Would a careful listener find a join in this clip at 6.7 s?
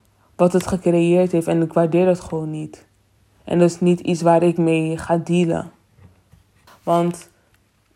yes; 1 cut; at 6.7 s

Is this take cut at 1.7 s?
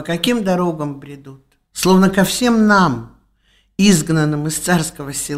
yes; 1 cut; at 1.7 s

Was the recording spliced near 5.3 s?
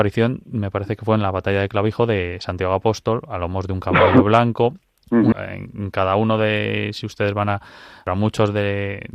yes; 1 cut; at 5.3 s

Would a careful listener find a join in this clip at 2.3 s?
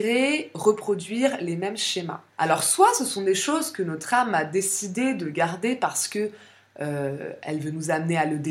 yes; 1 cut; at 2.3 s

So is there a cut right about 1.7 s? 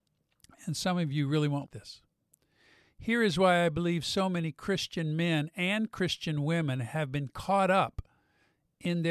yes; 1 cut; at 1.7 s

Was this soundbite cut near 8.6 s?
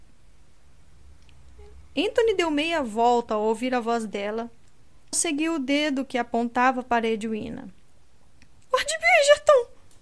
yes; 2 cuts; at 5.1 s, 8.6 s

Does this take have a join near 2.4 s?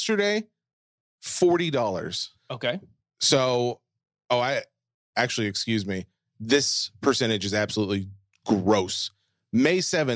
yes; 1 cut; at 2.4 s

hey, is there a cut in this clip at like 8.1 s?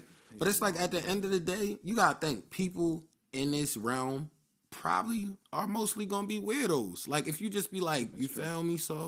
yes; 1 cut; at 8.1 s

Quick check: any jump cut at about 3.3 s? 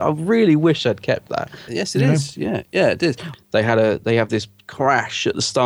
yes; 2 cuts; at 1.7 s, 3.3 s

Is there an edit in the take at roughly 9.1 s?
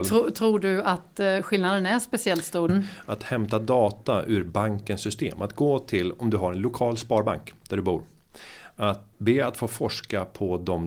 yes; 2 cuts; at 2.7 s, 9.1 s

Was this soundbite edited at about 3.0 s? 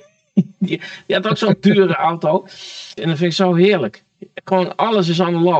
yes; 1 cut; at 3.0 s

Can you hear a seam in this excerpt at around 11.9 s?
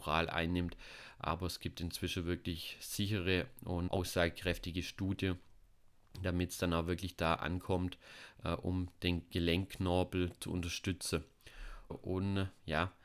yes; 2 cuts; at 3.9 s, 11.9 s

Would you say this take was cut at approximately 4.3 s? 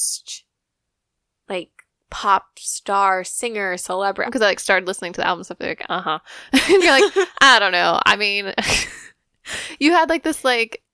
yes; 1 cut; at 4.3 s

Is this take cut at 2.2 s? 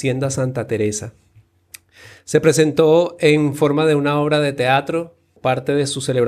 no; 1 cut; at 5.4 s

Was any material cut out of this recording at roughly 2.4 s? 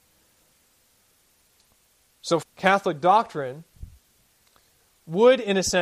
yes; 1 cut; at 2.4 s

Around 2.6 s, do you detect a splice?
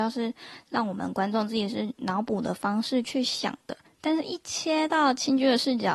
no; 1 cut; at 3.9 s

